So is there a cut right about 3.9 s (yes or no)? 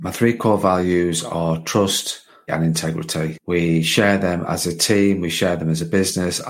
no